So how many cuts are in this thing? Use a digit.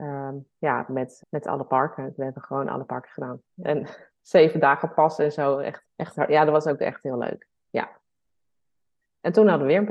3